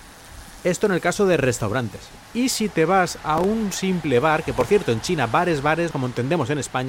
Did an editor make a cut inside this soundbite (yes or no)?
no